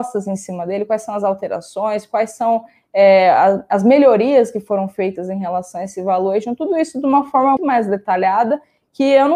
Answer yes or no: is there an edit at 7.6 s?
yes